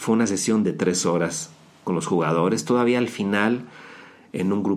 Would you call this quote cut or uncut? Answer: uncut